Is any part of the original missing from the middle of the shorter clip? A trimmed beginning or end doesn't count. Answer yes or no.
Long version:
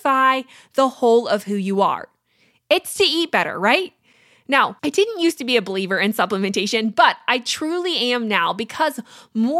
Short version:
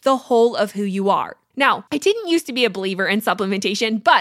yes